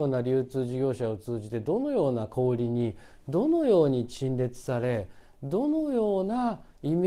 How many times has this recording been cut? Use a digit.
0